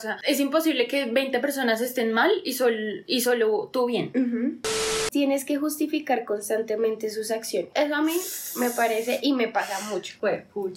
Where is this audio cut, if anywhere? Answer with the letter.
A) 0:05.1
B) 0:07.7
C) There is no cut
A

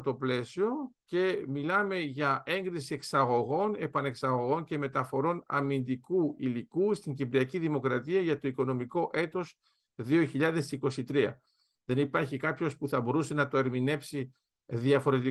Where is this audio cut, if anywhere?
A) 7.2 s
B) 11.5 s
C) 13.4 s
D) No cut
D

